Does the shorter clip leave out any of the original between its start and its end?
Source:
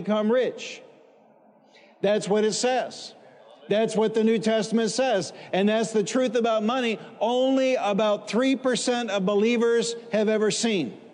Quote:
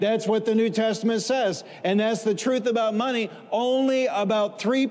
no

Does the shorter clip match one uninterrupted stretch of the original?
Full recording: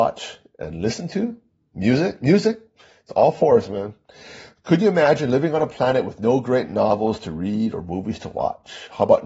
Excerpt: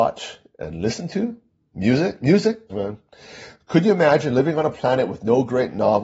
no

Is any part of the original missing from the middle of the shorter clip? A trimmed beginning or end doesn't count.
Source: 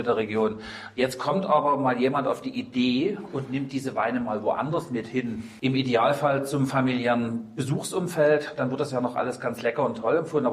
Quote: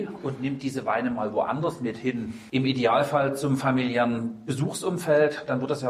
no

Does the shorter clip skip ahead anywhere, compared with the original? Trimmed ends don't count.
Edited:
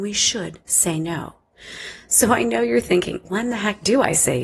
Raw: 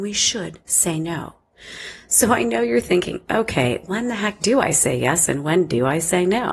yes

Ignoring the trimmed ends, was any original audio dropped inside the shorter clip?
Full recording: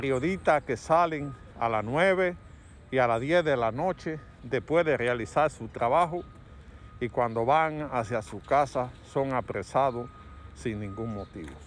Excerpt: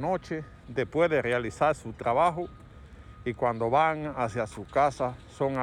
no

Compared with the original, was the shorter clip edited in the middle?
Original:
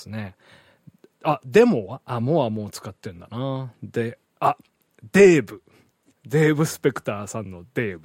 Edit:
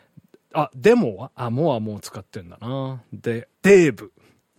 yes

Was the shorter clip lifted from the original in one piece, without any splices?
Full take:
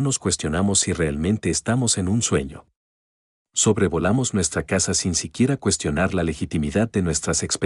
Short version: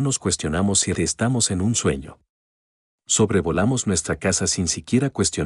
no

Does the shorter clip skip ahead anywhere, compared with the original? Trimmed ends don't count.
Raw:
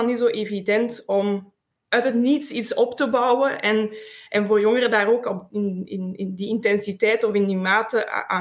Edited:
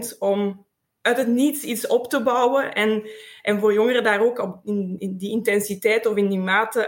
yes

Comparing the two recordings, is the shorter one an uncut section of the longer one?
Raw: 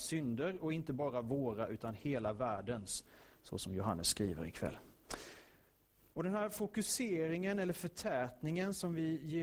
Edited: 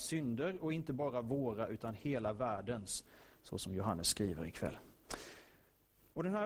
yes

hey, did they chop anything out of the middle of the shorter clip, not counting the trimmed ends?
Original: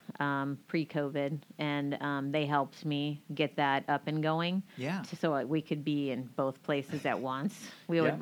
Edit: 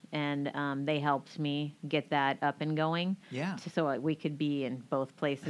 no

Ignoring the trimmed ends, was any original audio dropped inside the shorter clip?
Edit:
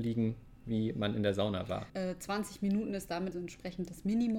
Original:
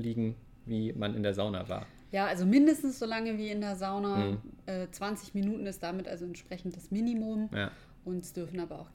yes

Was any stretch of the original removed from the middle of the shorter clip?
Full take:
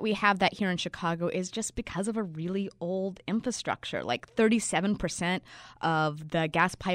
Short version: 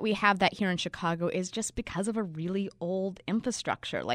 no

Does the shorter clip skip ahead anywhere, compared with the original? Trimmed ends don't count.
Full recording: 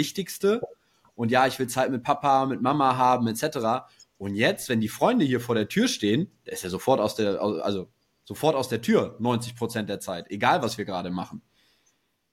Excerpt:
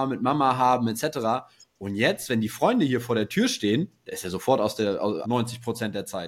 yes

